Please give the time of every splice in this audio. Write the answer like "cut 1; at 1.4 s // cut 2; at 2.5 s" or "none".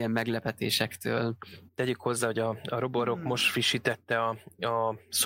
none